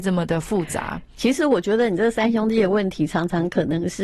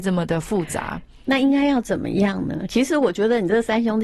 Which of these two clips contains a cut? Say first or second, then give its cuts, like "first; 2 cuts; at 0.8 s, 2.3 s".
first; 1 cut; at 1.2 s